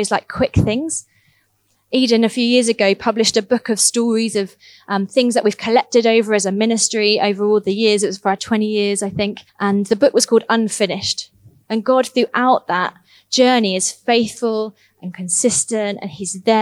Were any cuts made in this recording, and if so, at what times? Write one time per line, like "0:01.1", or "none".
0:09.5
0:11.7